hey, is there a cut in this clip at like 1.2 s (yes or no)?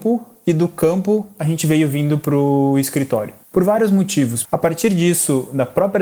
no